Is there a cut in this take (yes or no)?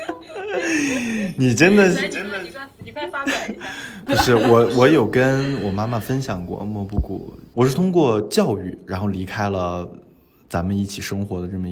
yes